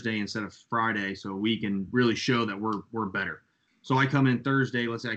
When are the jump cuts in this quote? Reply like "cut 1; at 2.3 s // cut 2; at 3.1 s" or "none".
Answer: none